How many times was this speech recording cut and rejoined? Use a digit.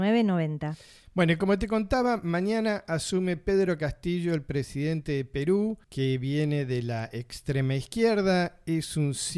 1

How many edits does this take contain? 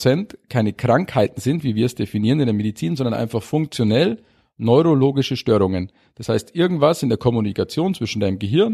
0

